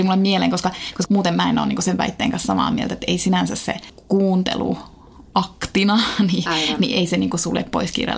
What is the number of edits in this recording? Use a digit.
1